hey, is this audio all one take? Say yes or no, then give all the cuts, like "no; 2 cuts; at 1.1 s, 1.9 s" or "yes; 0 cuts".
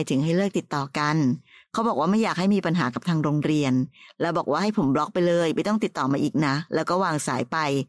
yes; 0 cuts